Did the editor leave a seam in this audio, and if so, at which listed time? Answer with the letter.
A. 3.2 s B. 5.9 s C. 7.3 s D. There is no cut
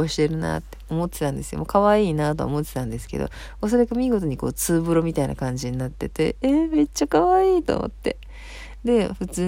D